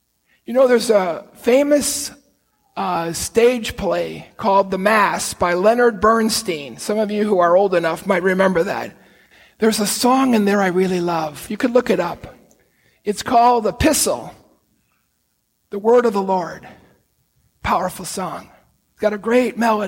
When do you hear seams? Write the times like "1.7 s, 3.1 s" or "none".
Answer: none